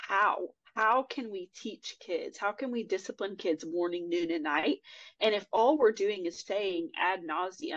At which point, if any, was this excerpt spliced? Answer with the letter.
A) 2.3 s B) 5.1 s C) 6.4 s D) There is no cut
C